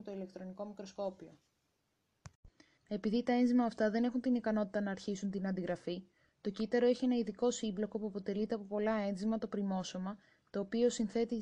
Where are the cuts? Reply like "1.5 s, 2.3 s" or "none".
2.8 s